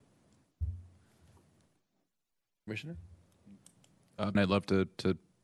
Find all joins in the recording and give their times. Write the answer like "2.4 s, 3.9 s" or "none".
4.3 s